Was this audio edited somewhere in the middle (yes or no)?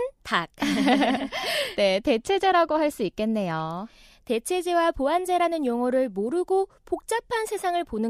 no